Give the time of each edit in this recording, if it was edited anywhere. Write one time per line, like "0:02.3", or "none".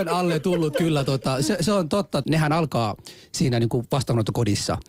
0:02.2